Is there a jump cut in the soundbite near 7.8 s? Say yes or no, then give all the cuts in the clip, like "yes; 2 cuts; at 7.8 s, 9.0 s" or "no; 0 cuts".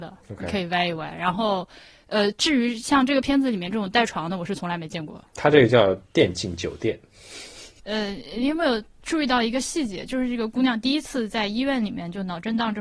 yes; 1 cut; at 7.8 s